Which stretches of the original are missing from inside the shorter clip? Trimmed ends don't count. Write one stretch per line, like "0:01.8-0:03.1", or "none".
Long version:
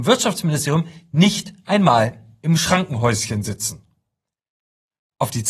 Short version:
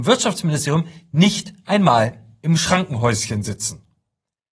none